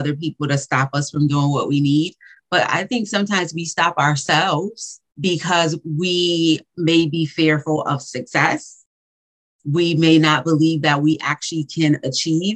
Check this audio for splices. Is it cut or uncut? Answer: cut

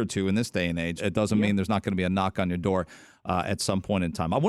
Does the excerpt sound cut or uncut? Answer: cut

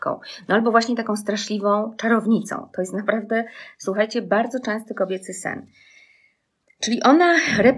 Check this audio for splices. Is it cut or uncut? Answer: uncut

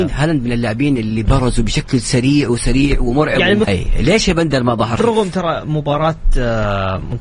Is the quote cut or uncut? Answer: cut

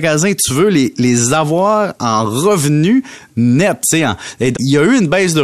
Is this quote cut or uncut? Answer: cut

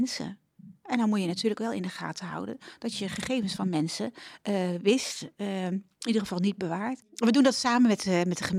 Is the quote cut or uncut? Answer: uncut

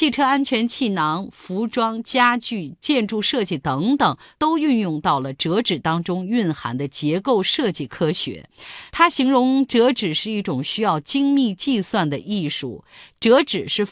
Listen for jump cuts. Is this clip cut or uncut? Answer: uncut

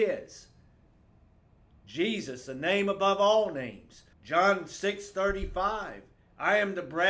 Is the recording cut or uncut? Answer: cut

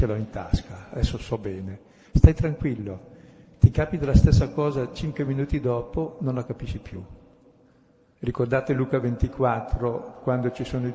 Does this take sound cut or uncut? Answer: cut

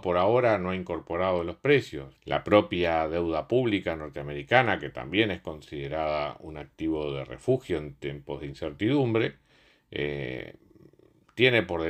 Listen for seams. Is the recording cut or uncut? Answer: cut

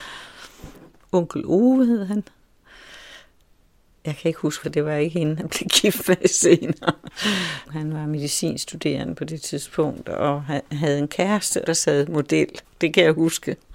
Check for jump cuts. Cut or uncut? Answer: cut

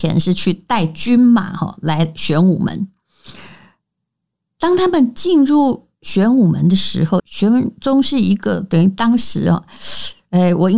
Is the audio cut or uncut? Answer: cut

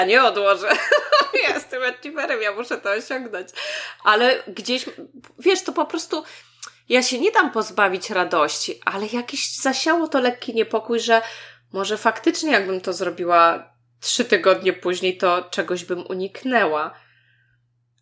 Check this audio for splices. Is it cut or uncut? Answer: uncut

